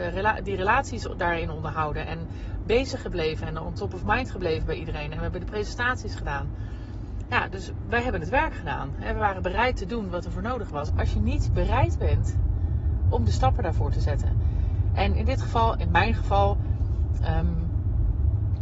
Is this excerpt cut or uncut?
cut